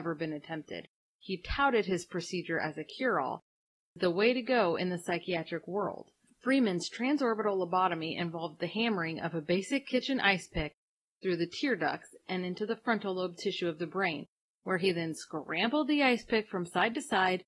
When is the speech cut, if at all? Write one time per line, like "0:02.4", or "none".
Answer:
none